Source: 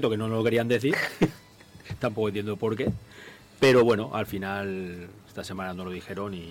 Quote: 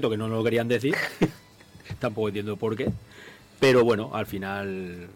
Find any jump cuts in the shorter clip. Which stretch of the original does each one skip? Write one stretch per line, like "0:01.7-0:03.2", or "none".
none